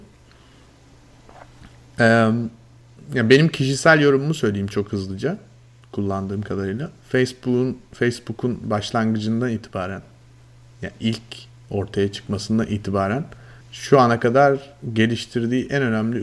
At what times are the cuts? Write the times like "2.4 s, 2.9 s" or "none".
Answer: 13.6 s

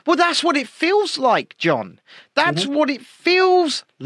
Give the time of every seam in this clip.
none

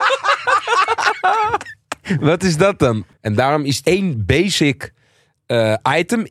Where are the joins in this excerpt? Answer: 3.2 s

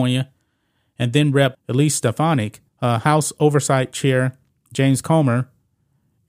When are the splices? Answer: 1.5 s, 2.7 s

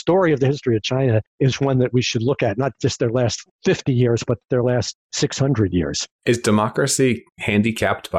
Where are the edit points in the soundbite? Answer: none

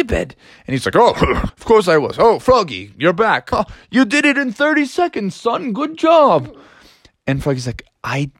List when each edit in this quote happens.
1.5 s, 3.5 s

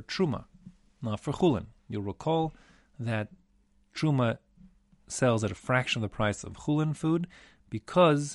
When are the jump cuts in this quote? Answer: none

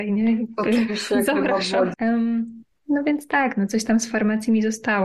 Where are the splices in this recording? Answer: 1.9 s

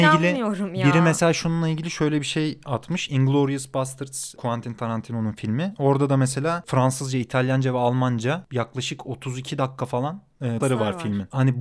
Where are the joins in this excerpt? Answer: 10.6 s

